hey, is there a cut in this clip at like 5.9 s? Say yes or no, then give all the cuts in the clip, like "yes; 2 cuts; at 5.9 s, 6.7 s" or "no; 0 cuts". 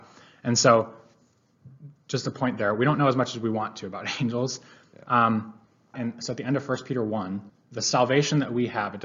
yes; 2 cuts; at 5.9 s, 7.5 s